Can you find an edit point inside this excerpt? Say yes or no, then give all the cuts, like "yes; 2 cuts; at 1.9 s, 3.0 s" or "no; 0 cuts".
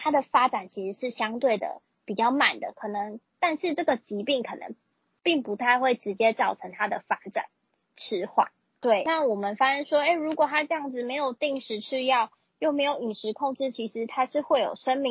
no; 0 cuts